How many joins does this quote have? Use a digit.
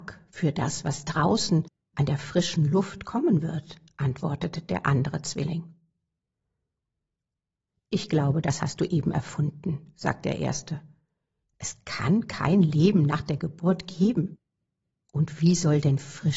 0